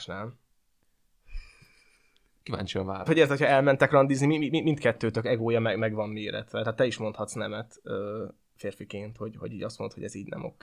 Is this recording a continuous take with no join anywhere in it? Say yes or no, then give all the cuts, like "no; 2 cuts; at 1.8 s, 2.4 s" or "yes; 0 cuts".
no; 1 cut; at 3.1 s